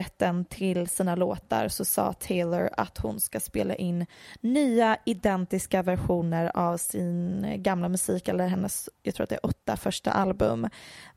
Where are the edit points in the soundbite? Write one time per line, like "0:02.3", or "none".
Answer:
none